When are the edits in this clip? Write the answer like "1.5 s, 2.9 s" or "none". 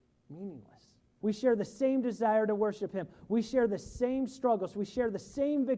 1.2 s